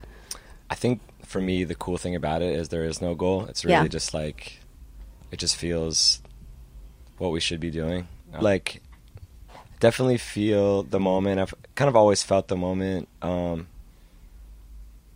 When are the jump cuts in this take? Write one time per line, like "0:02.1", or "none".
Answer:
0:08.4